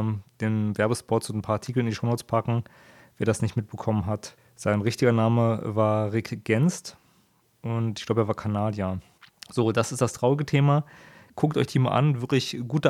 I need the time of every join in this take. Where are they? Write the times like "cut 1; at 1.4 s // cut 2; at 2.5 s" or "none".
cut 1; at 11.3 s